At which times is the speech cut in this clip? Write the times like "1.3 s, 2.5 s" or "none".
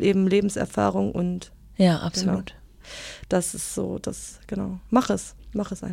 none